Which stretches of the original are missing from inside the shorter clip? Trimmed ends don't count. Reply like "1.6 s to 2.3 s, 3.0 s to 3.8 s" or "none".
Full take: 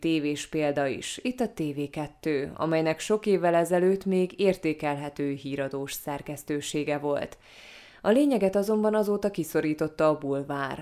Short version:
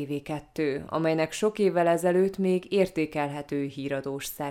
none